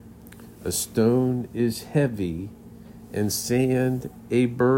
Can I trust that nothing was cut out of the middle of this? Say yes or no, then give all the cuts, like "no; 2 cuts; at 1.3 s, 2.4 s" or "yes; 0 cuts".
yes; 0 cuts